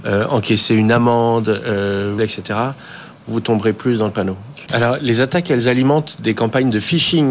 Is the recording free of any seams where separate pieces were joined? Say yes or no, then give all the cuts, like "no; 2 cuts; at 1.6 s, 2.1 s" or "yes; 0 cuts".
no; 2 cuts; at 2.2 s, 4.7 s